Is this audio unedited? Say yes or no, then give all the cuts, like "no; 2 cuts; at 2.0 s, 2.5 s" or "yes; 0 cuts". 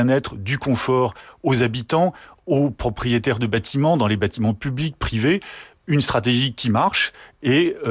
yes; 0 cuts